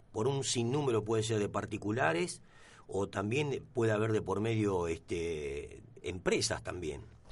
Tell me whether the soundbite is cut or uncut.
cut